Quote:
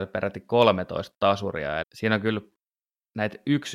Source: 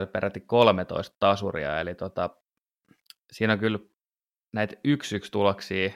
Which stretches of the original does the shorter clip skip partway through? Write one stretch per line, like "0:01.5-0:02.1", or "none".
0:01.8-0:03.2